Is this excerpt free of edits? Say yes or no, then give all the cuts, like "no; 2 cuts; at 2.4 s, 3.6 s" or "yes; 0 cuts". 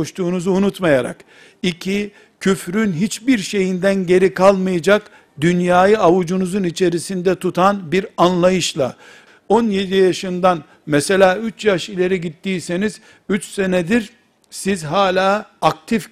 no; 1 cut; at 9.3 s